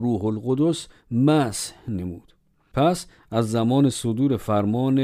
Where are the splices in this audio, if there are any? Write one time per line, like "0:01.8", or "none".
none